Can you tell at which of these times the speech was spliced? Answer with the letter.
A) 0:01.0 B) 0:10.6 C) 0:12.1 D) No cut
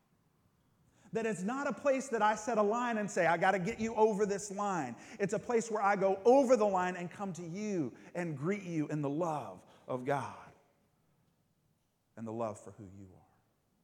D